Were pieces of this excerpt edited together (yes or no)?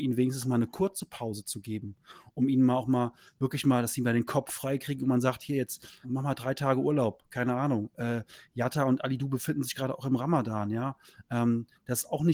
yes